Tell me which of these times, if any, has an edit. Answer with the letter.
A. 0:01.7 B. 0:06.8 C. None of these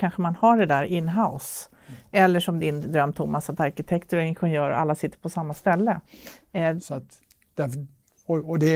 B